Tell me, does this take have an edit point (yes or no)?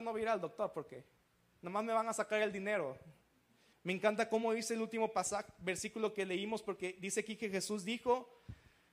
yes